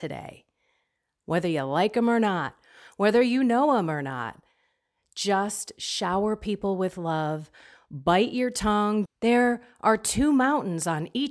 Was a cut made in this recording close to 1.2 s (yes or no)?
no